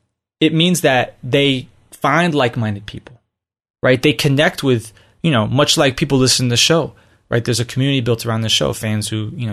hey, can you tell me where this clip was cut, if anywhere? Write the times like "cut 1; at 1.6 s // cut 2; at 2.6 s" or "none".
none